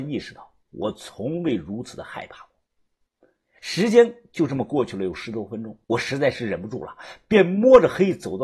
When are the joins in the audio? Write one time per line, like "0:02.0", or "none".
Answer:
0:03.6
0:05.8